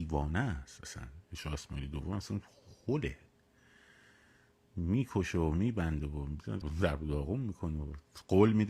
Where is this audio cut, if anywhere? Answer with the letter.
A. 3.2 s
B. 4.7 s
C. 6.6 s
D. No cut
C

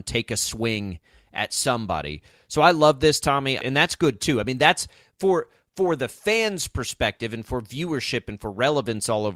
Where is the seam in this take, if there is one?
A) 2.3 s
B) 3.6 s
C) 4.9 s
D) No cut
B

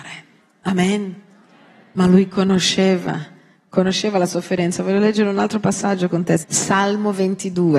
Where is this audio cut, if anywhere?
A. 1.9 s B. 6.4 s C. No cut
B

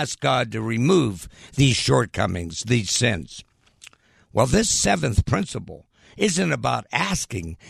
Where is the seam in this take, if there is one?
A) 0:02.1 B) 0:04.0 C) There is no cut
C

